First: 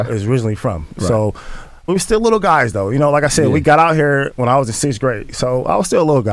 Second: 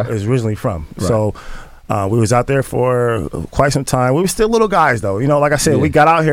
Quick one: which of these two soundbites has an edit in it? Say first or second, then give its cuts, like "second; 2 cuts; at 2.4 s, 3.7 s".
first; 1 cut; at 1.9 s